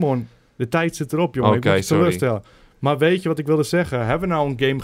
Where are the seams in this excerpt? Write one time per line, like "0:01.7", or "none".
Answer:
none